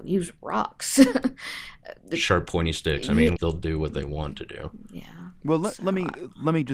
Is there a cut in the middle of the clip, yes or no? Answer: yes